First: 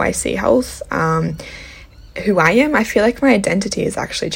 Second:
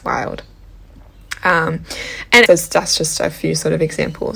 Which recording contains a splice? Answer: second; 1 cut; at 2.5 s

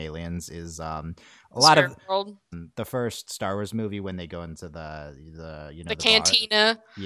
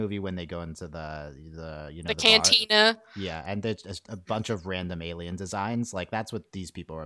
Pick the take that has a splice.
first; 1 cut; at 2.5 s

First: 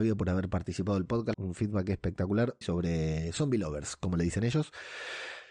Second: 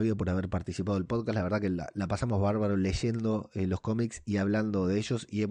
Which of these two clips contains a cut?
first; 2 cuts; at 1.3 s, 2.6 s

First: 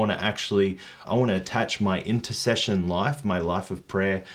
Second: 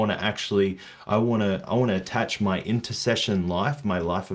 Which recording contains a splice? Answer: first; 1 cut; at 1.0 s

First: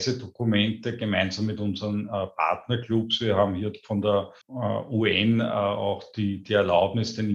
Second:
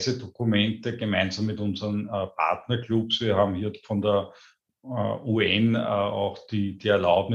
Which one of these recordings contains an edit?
first; 1 cut; at 4.4 s

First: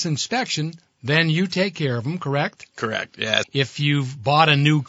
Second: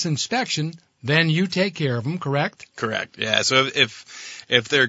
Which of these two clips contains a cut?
first; 1 cut; at 3.4 s

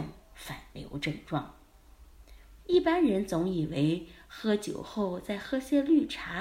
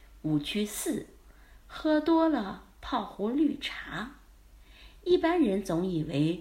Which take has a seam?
first; 1 cut; at 2.6 s

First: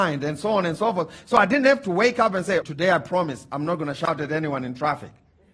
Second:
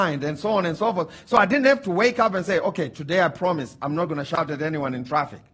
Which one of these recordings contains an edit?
first; 1 cut; at 2.6 s

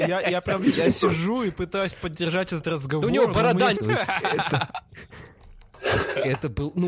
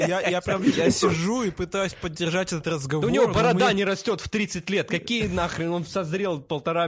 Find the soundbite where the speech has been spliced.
first; 1 cut; at 3.7 s

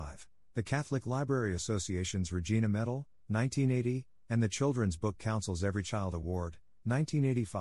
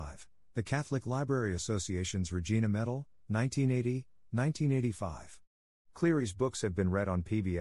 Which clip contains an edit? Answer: second; 1 cut; at 4.2 s

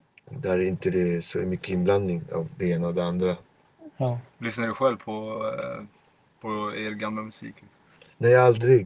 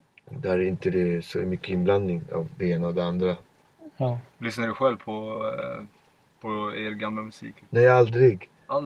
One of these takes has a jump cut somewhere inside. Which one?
second; 1 cut; at 7.6 s

